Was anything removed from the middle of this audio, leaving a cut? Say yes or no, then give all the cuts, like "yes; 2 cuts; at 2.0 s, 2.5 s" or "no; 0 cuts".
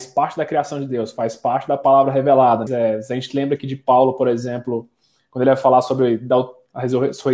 yes; 1 cut; at 2.7 s